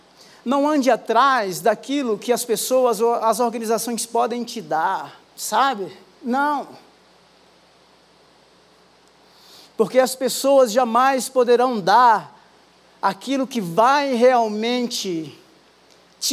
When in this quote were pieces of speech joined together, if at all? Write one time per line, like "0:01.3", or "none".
0:05.2